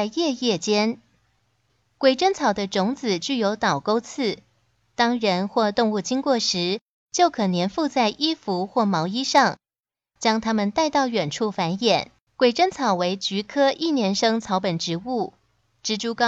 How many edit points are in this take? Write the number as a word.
two